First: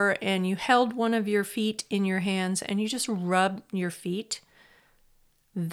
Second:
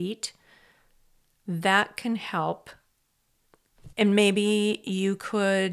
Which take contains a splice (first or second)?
second